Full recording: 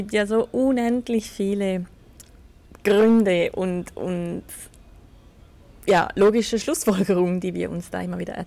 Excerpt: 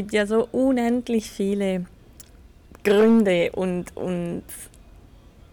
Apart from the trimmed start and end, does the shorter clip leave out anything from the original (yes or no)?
no